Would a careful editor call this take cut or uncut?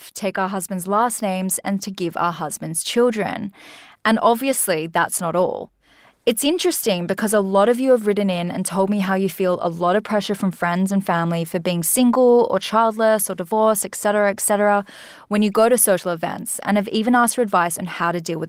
uncut